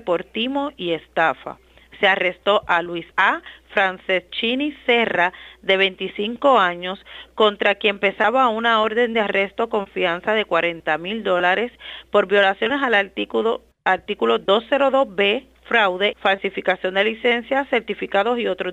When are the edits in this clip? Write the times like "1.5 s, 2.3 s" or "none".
3.1 s, 16.1 s